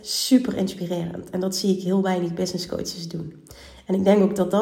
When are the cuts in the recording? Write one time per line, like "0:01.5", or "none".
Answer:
none